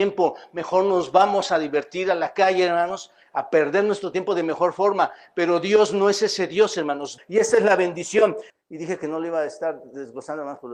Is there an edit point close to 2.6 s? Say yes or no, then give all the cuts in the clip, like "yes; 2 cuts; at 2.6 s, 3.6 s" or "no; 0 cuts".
no; 2 cuts; at 7.2 s, 8.5 s